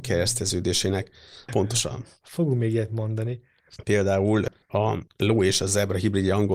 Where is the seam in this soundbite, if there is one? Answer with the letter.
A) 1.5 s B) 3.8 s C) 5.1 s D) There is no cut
A